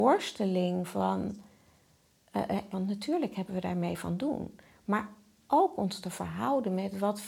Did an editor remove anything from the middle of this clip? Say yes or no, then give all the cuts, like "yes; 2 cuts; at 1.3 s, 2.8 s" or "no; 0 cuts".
yes; 1 cut; at 2.7 s